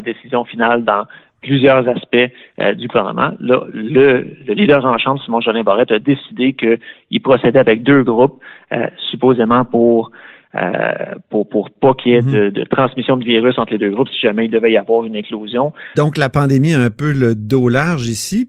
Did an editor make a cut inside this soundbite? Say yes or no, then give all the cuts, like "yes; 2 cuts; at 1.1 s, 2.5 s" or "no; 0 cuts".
yes; 2 cuts; at 4.4 s, 15.9 s